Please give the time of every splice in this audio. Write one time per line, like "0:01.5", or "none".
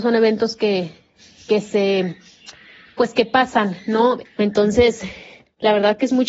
0:04.2